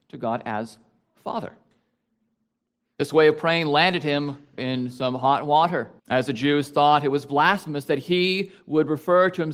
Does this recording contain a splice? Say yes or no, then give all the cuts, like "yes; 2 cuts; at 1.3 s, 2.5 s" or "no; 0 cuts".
yes; 2 cuts; at 4.6 s, 6.0 s